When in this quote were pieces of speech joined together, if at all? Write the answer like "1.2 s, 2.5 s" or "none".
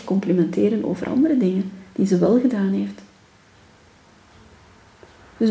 none